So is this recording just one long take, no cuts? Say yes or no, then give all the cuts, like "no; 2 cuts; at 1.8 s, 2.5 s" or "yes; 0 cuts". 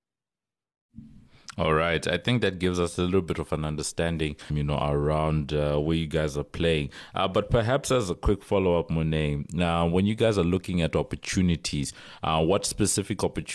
no; 1 cut; at 4.5 s